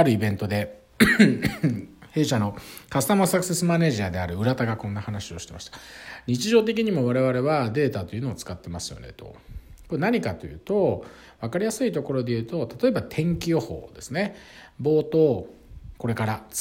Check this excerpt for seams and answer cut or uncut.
uncut